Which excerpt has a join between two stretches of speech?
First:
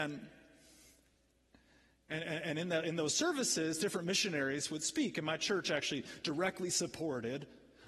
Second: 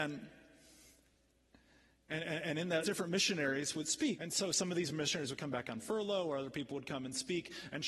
second; 2 cuts; at 2.8 s, 4.2 s

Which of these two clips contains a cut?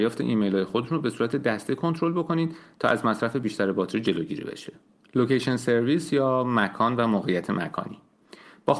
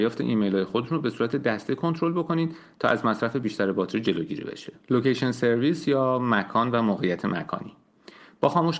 second; 1 cut; at 4.8 s

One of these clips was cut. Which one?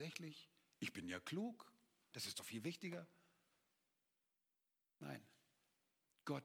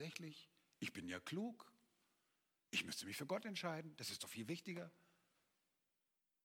first; 1 cut; at 2.1 s

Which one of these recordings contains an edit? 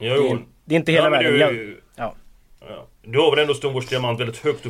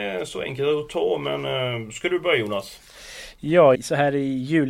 second; 1 cut; at 3.7 s

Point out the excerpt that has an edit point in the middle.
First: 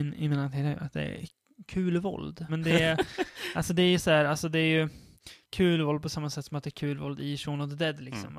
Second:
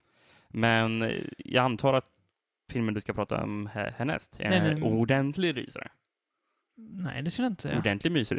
first; 2 cuts; at 2.5 s, 5.4 s

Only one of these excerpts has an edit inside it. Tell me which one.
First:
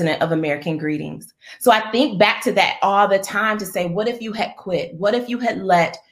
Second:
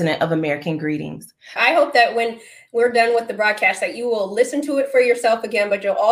second; 1 cut; at 1.6 s

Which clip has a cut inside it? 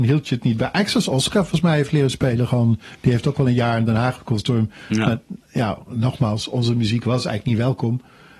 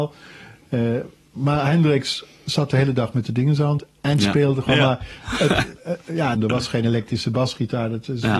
second; 2 cuts; at 4.7 s, 6.3 s

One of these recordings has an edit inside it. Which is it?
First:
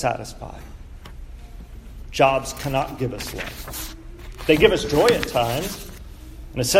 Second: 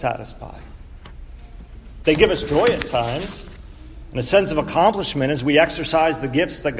second; 1 cut; at 2.0 s

